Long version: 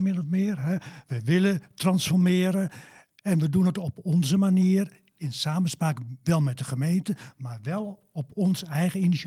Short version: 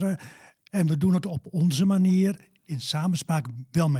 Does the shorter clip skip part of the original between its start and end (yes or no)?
no